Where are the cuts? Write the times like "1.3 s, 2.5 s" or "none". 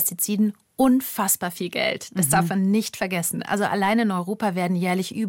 none